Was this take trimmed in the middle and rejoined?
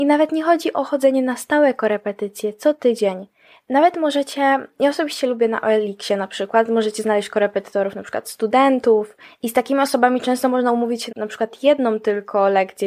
yes; 1 cut; at 11.1 s

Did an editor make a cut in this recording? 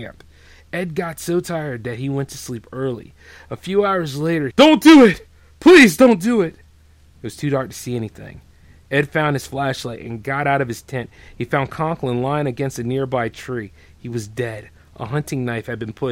yes; 1 cut; at 4.5 s

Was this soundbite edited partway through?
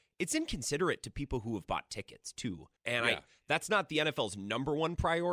yes; 1 cut; at 2.8 s

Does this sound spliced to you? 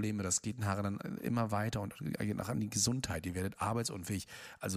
no; 0 cuts

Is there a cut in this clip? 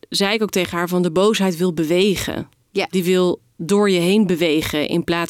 no; 0 cuts

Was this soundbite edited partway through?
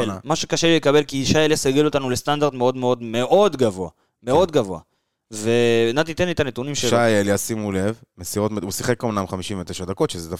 no; 0 cuts

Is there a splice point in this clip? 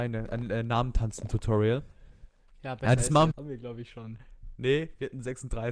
yes; 1 cut; at 3.3 s

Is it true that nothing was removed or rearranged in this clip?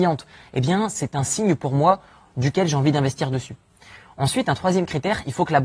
yes; 0 cuts

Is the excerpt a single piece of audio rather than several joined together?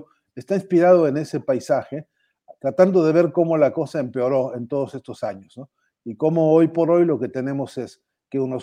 yes; 0 cuts

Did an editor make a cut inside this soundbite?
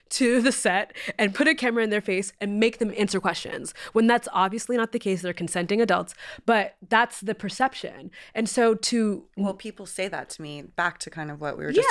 no; 0 cuts

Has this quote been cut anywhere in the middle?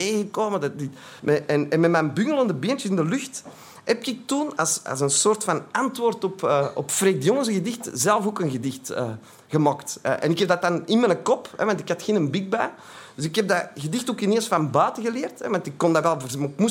yes; 1 cut; at 1.2 s

